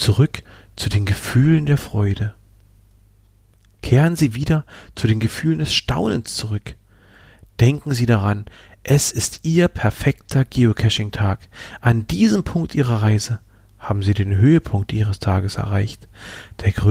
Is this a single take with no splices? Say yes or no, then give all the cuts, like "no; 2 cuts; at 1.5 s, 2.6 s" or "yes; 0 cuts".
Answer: yes; 0 cuts